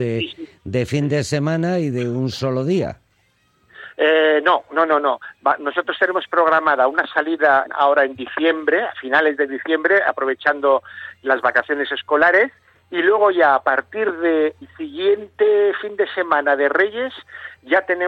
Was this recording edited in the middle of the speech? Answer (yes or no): yes